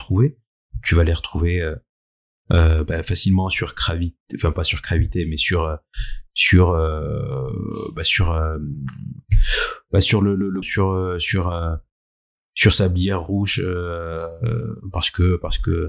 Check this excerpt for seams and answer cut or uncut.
cut